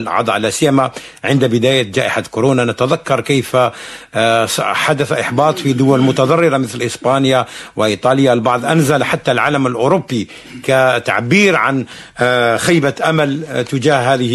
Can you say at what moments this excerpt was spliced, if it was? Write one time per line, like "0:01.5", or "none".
none

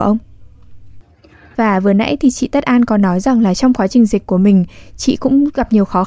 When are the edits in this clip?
0:01.5

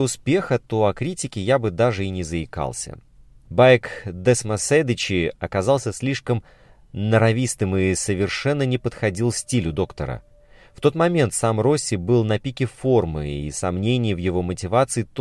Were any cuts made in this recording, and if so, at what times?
0:03.4

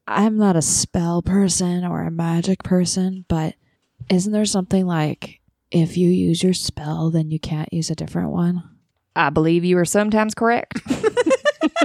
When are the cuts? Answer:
none

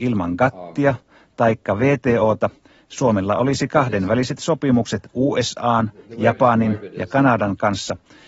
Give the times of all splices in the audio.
none

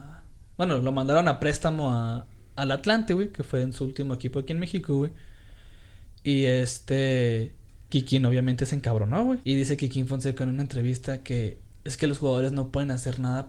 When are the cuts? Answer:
0:07.9
0:09.4

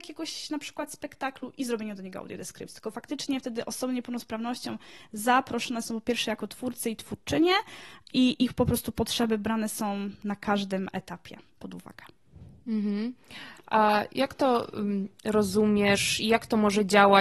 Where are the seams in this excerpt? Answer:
none

